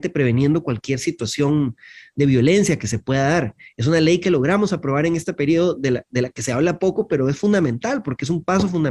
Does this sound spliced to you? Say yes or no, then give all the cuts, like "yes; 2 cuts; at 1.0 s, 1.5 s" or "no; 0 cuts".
no; 0 cuts